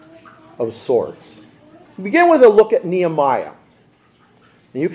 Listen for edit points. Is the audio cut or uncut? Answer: cut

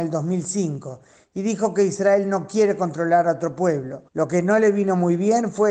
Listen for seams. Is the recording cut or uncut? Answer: cut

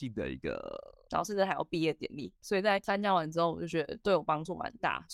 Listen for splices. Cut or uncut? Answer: cut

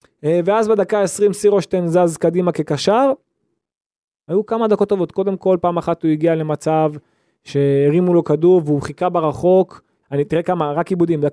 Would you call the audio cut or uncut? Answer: cut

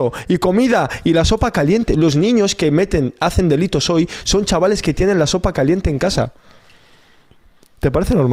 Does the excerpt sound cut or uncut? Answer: uncut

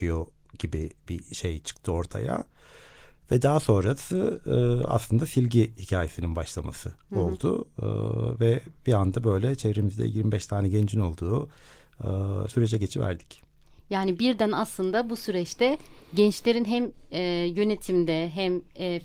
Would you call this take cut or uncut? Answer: cut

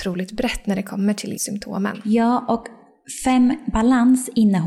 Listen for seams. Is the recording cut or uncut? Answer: cut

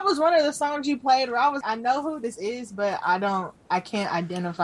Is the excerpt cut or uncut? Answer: cut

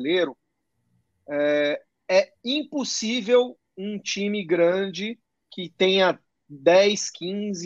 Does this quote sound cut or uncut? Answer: uncut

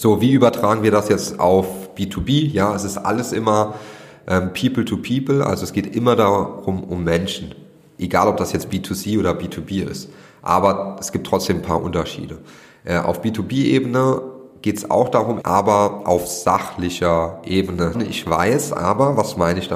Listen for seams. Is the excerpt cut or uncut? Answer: cut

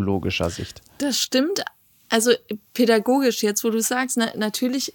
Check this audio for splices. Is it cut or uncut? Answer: uncut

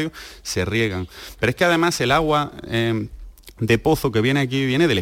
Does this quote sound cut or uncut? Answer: uncut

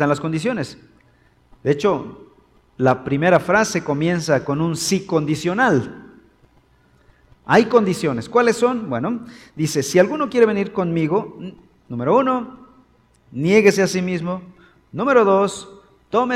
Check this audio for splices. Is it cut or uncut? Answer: uncut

